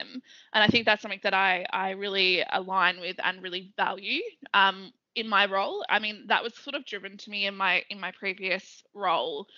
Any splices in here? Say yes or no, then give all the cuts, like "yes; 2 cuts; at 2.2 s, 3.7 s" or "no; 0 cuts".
yes; 1 cut; at 5.9 s